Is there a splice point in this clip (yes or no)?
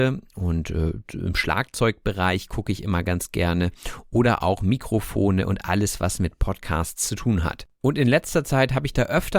no